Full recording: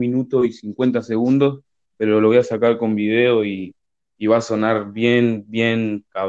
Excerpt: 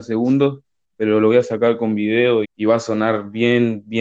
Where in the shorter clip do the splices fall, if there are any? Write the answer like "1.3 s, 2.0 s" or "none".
2.4 s